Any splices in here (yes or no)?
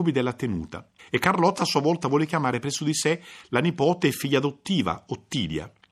yes